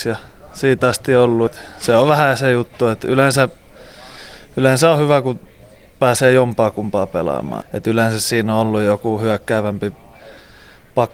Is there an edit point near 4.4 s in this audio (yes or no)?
no